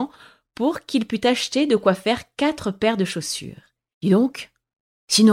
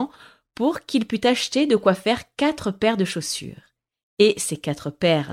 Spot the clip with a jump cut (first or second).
first